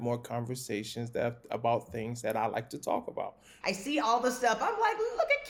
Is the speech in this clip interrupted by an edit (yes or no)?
yes